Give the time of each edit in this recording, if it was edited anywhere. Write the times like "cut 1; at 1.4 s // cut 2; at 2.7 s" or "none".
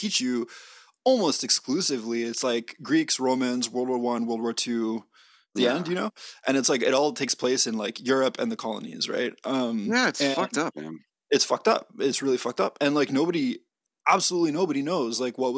none